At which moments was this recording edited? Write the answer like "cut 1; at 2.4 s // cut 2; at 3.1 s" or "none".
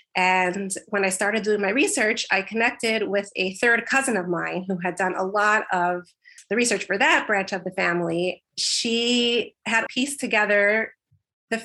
cut 1; at 8.5 s // cut 2; at 9.9 s